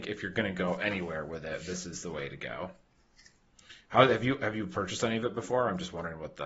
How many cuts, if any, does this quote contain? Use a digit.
0